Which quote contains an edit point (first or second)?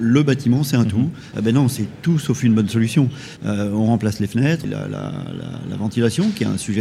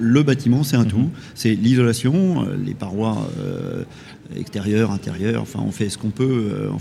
first